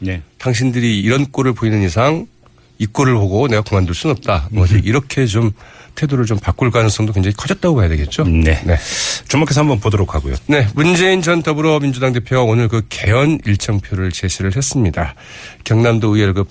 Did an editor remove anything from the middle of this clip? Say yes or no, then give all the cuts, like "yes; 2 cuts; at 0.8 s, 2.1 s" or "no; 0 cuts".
yes; 1 cut; at 10.4 s